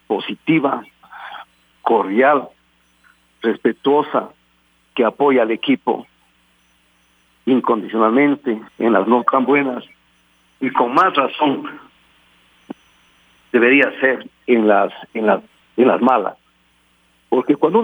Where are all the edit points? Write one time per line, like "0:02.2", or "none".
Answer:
0:08.7
0:15.1